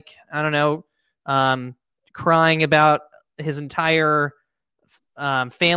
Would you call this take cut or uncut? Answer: uncut